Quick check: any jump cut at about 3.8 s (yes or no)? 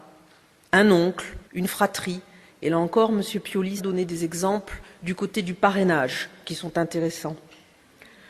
yes